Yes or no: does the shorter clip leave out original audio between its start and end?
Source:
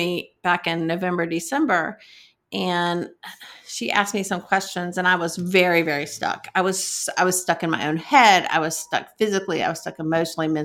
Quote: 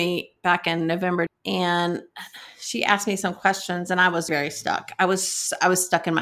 yes